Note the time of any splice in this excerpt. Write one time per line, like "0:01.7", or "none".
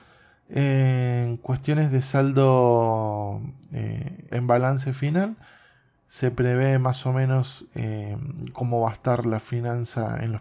0:04.3